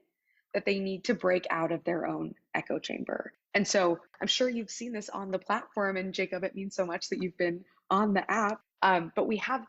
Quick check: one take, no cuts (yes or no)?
yes